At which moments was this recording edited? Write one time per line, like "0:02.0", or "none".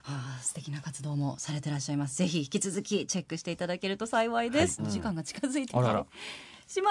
0:04.8